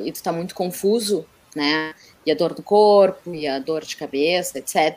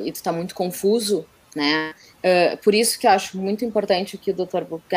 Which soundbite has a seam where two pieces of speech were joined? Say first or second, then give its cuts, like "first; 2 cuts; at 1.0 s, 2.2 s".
second; 1 cut; at 2.1 s